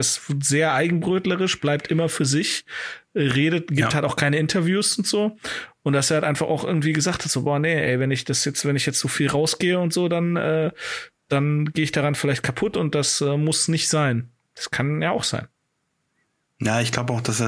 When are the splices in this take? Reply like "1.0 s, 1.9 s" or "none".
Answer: none